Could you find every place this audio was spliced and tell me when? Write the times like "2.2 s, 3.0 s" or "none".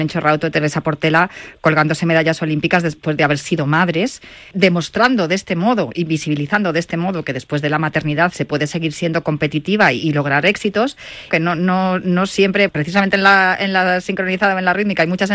4.5 s, 11.3 s, 12.7 s